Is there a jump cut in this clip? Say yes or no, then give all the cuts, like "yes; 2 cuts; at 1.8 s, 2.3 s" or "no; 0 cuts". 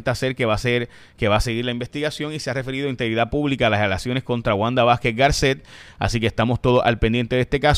no; 0 cuts